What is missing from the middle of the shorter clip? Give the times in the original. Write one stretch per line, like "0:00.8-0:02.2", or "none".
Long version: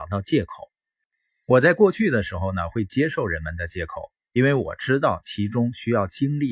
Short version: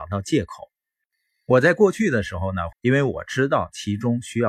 0:02.7-0:04.2